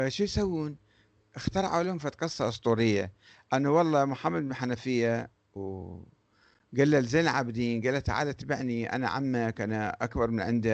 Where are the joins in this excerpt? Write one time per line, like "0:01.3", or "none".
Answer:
none

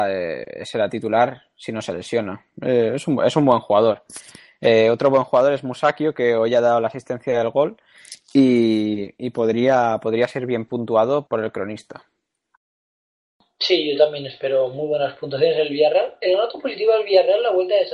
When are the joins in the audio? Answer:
0:11.3

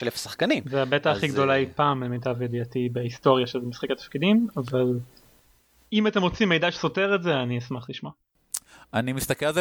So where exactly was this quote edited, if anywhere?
none

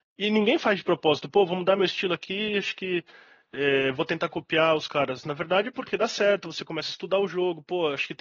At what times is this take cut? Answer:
none

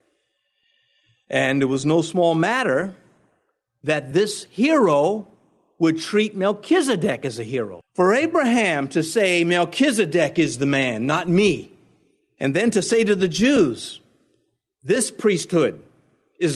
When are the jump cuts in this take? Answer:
0:07.8

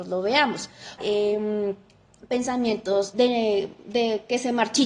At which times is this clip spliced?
0:01.0
0:03.1

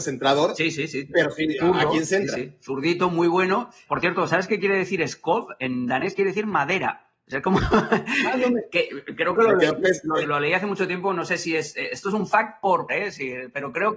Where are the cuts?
0:10.2
0:12.9

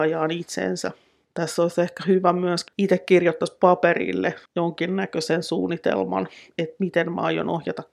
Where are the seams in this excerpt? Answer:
0:02.7
0:04.5

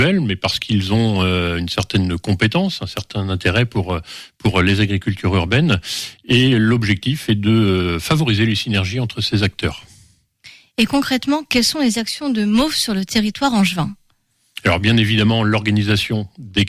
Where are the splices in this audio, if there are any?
none

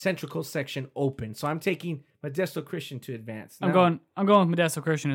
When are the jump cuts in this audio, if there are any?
none

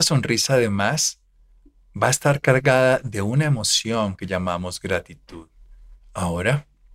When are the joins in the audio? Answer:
0:06.0

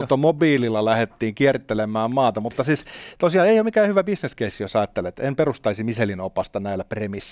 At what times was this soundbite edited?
none

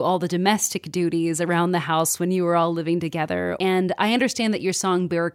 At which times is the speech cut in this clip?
0:03.6

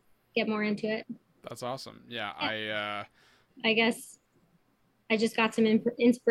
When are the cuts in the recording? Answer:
0:03.5

